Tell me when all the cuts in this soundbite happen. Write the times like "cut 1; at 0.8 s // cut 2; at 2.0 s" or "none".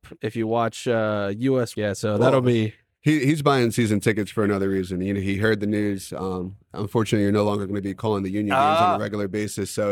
cut 1; at 1.7 s